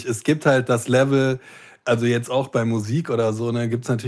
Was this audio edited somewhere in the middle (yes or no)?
no